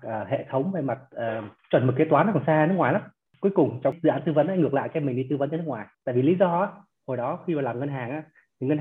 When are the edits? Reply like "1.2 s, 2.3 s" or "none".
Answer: 1.6 s, 5.9 s